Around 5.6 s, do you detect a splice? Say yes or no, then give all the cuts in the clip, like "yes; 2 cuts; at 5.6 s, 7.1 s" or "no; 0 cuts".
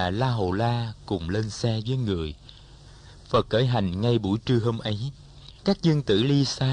yes; 1 cut; at 5.6 s